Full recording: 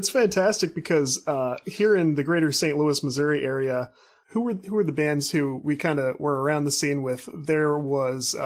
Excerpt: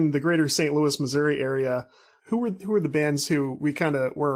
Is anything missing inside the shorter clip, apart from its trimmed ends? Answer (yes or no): no